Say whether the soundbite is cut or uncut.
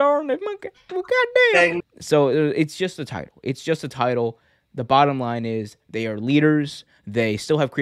cut